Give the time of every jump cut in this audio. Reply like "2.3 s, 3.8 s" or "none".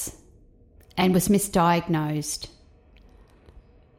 none